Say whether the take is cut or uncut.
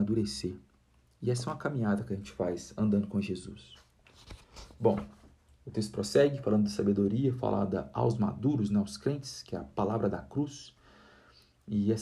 uncut